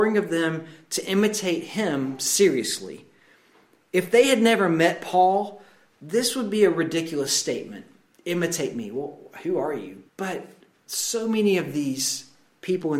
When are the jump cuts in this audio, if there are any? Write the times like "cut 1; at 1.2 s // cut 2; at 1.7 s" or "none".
cut 1; at 10.1 s